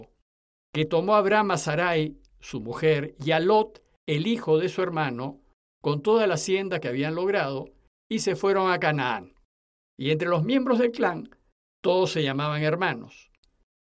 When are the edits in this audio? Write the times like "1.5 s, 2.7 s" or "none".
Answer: 9.9 s

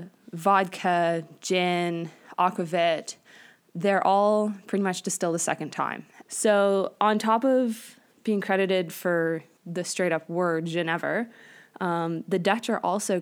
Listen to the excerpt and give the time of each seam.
6.2 s, 9.6 s

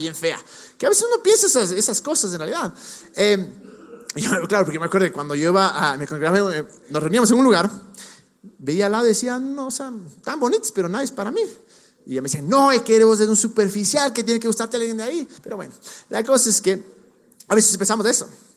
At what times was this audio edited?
15.4 s

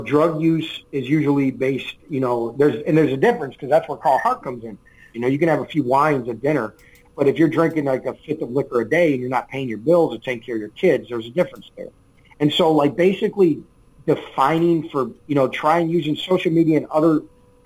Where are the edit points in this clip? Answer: 5.1 s

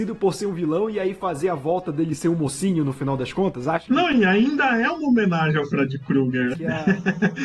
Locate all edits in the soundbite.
6.5 s

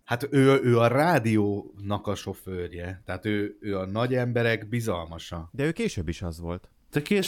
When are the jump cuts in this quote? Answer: none

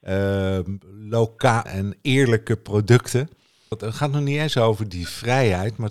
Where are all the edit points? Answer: 1.7 s, 3.7 s

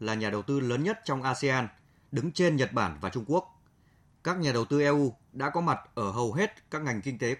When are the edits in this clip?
4.0 s

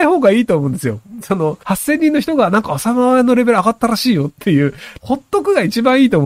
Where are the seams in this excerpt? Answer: 1.6 s, 5.0 s

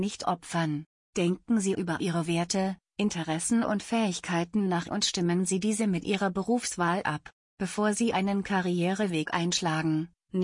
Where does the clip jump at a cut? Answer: 1.0 s, 7.4 s

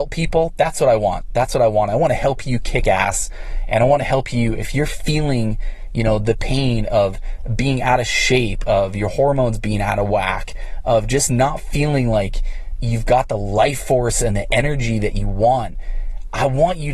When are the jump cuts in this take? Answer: none

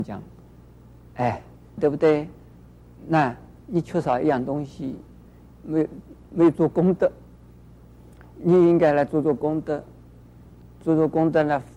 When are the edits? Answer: 1.8 s, 5.5 s

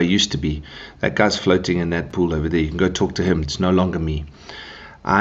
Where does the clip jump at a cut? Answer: 3.4 s

